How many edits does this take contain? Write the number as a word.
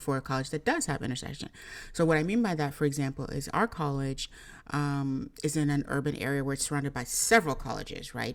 zero